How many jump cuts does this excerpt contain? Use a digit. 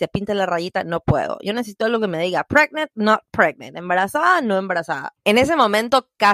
1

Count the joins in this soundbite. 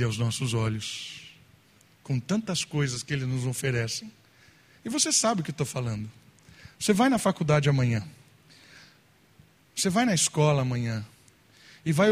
0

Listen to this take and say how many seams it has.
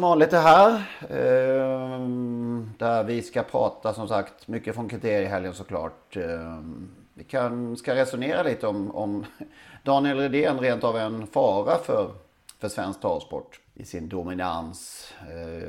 0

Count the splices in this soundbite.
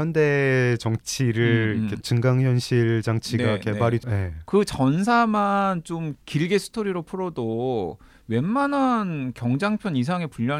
3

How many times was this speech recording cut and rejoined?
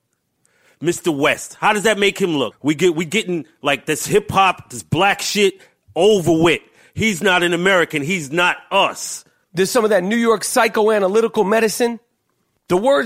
2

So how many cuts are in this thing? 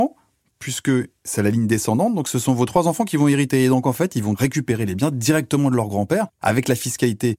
0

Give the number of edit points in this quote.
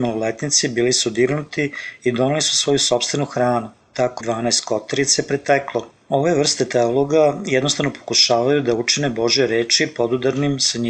1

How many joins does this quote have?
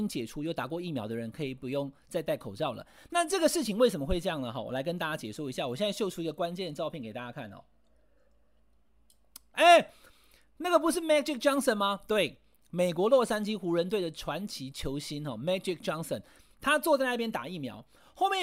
1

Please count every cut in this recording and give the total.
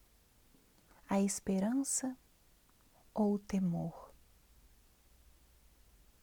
1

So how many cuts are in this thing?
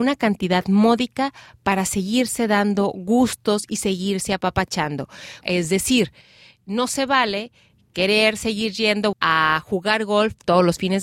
2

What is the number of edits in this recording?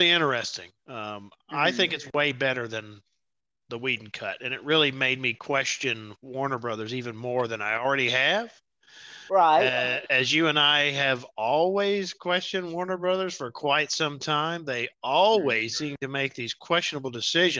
0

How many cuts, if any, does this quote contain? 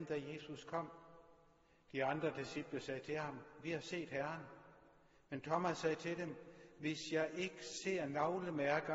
0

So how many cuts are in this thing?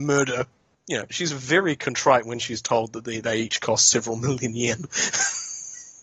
1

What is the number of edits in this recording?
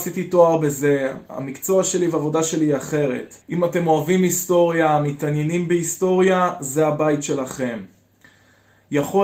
1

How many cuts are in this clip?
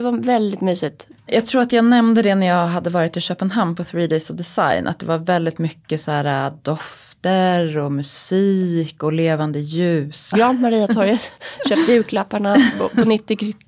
2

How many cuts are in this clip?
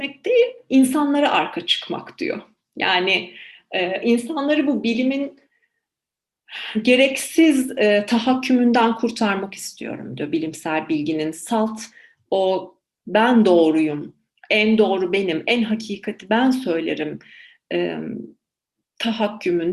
0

